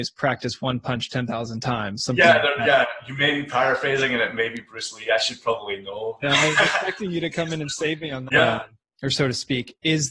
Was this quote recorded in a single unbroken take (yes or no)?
no